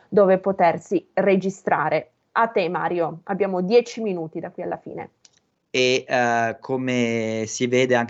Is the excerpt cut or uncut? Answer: cut